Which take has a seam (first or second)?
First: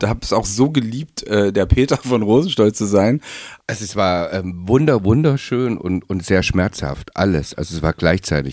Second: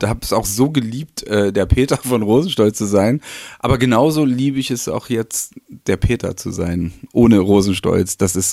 first